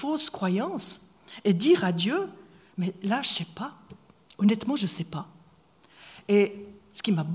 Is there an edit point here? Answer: no; 0 cuts

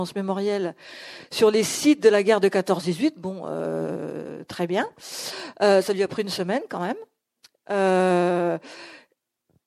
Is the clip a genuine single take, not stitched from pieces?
yes; 0 cuts

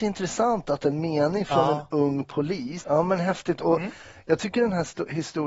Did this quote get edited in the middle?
yes; 1 cut; at 2.8 s

